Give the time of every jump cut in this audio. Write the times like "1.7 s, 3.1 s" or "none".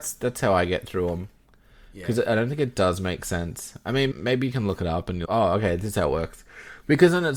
4.1 s, 5.3 s